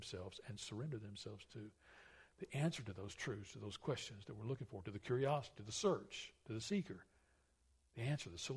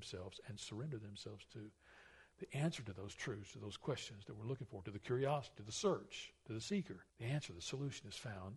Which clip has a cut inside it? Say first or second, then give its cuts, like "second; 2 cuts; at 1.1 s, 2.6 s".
second; 1 cut; at 7.1 s